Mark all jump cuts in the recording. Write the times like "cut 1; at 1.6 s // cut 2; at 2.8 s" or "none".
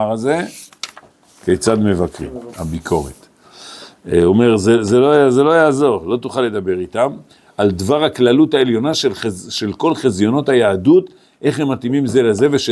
cut 1; at 2.5 s